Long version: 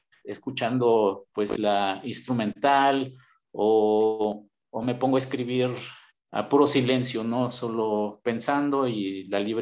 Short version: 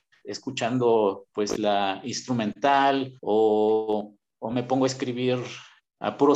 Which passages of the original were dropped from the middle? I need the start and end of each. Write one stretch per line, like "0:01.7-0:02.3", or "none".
0:03.2-0:03.5